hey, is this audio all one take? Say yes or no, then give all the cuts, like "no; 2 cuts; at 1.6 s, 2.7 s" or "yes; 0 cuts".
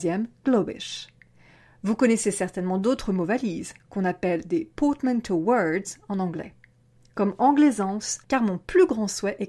no; 1 cut; at 8.2 s